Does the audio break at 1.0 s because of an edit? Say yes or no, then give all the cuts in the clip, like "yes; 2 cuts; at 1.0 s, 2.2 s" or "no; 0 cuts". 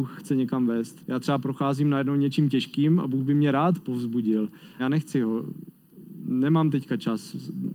yes; 2 cuts; at 1.0 s, 4.8 s